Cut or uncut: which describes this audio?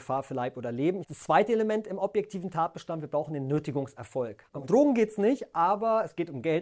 cut